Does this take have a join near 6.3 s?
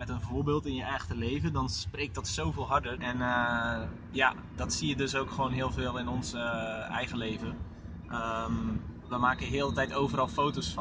no; 1 cut; at 3.0 s

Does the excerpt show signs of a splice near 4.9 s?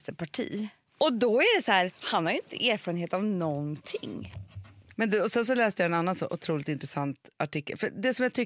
yes; 1 cut; at 4.9 s

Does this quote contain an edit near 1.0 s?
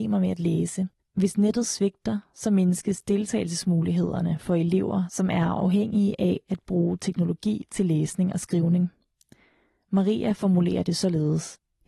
yes; 1 cut; at 1.0 s

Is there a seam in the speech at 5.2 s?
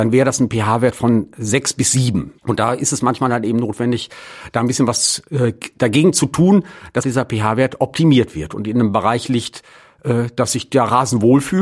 no; 2 cuts; at 2.4 s, 7.0 s

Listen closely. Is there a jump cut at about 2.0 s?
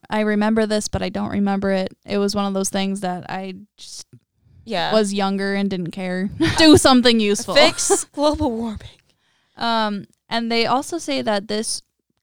no; 1 cut; at 6.6 s

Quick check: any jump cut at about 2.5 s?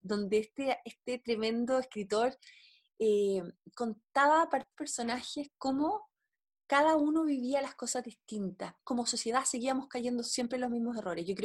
no; 0 cuts

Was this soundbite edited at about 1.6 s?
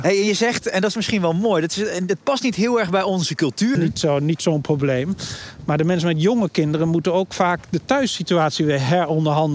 no; 1 cut; at 3.8 s

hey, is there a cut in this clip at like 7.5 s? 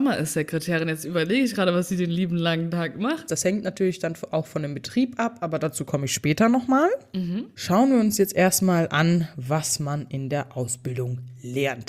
no; 1 cut; at 3.3 s

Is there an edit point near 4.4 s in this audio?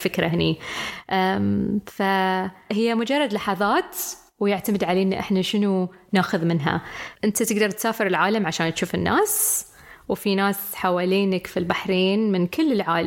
no; 0 cuts

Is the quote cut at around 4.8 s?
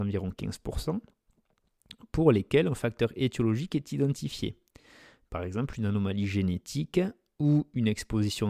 no; 0 cuts

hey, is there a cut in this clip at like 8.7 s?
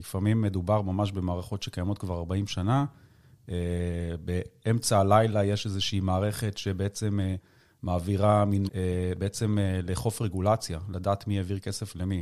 yes; 1 cut; at 8.7 s

